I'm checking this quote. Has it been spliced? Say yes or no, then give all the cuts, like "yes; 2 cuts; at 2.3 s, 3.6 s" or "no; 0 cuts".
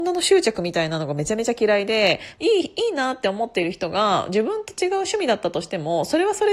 yes; 1 cut; at 2.4 s